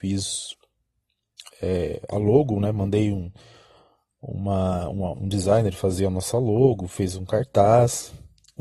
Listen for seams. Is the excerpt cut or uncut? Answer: cut